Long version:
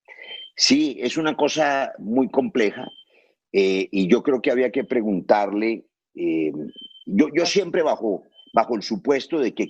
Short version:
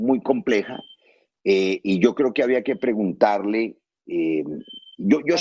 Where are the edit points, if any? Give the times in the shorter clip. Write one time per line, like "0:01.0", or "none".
none